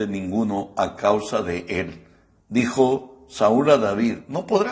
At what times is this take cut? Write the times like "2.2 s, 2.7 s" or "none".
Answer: 2.4 s